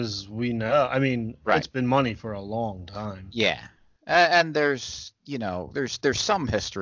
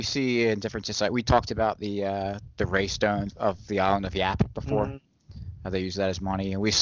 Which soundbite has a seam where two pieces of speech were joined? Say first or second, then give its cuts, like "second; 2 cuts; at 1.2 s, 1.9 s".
second; 1 cut; at 3.3 s